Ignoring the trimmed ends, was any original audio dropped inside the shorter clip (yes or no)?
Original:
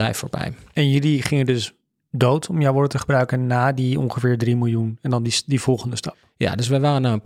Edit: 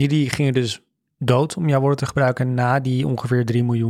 no